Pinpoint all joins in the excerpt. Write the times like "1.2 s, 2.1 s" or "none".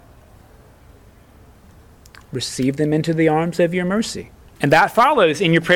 4.6 s